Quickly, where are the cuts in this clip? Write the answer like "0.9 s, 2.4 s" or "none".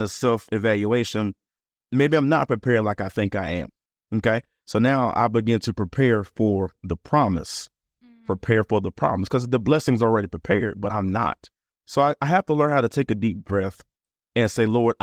11.7 s